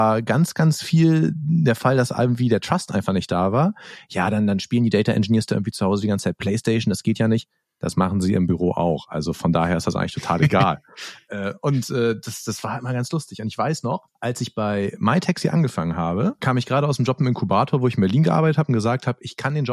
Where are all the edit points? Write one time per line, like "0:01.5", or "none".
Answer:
none